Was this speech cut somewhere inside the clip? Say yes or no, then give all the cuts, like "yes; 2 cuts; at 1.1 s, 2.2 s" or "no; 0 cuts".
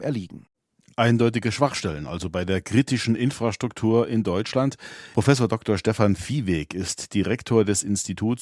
yes; 1 cut; at 5.1 s